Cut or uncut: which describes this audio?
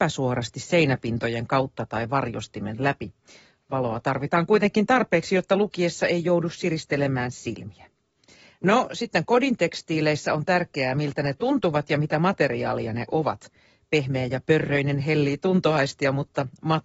uncut